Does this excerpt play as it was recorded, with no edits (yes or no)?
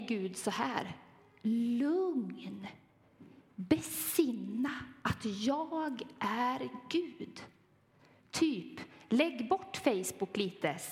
yes